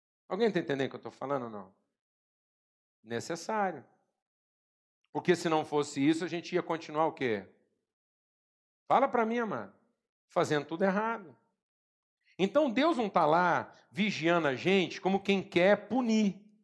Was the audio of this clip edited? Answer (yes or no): yes